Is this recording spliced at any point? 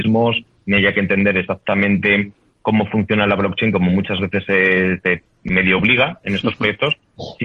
no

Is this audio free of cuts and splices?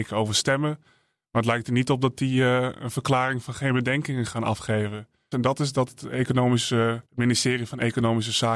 no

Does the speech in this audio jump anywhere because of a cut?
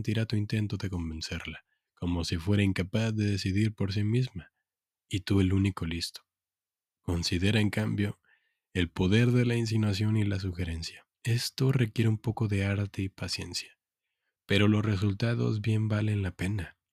yes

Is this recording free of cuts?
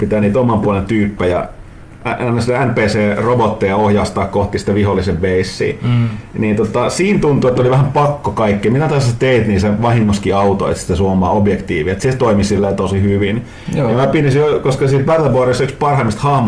yes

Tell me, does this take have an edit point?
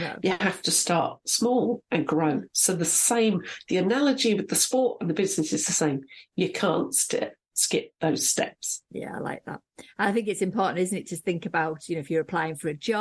no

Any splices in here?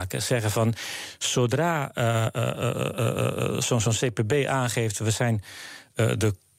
no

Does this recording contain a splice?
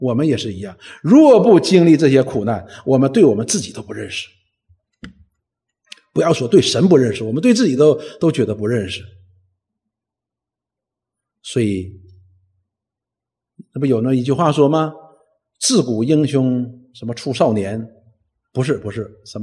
no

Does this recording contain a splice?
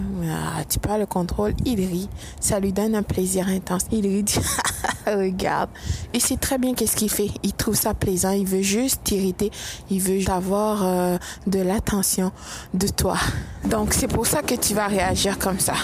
yes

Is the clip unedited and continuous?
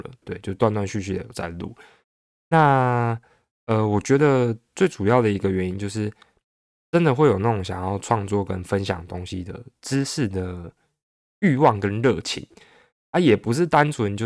yes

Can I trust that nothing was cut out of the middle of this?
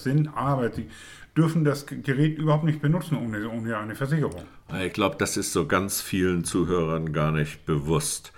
yes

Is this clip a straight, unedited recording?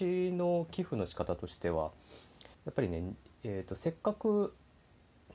no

